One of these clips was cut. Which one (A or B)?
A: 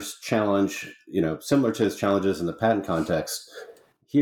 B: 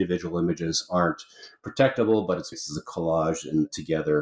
B